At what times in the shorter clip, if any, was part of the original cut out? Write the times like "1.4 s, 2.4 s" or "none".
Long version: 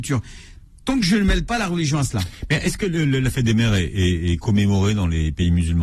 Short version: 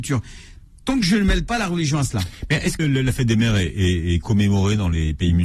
2.8 s

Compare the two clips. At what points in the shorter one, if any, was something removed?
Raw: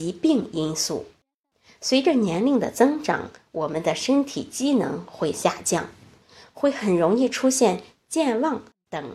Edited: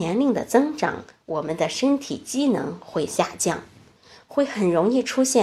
none

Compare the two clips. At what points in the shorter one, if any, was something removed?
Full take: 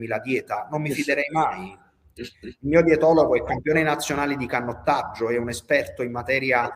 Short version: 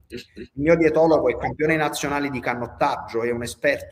none

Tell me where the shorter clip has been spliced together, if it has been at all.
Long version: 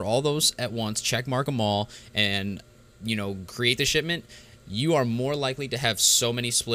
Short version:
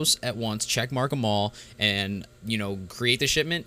2.4 s

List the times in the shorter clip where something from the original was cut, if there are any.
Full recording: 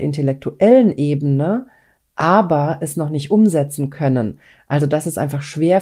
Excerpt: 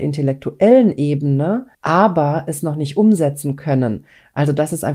1.7 s

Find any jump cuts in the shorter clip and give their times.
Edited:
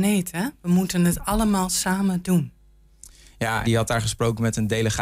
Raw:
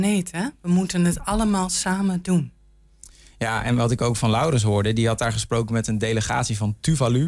3.6 s

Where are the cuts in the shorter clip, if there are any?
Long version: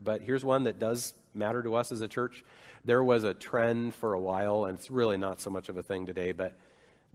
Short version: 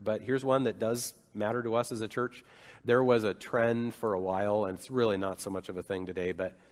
none

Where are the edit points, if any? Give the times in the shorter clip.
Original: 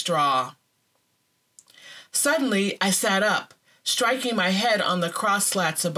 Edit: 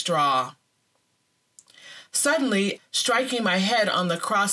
2.8 s

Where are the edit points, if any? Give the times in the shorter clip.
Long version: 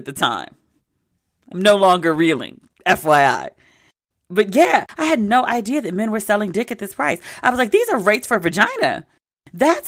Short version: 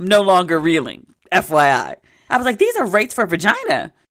2.3 s

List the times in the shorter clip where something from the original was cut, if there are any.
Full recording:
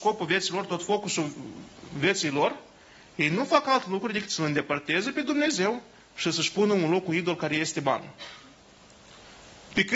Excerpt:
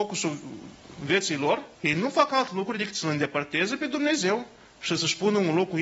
1.7 s

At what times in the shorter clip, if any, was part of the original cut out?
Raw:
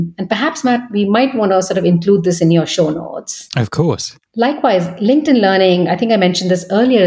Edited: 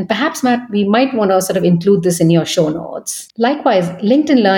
3.3 s

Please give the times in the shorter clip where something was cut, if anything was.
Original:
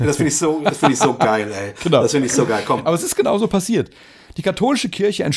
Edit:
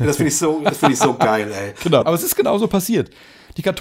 2.0 s

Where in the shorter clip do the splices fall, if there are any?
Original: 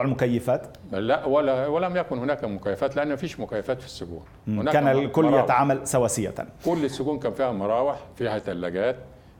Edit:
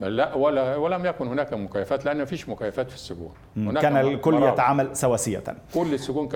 none

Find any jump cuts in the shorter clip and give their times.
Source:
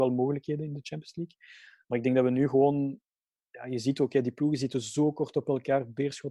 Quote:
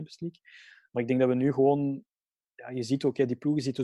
none

